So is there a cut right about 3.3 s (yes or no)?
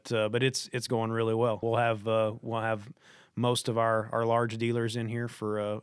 no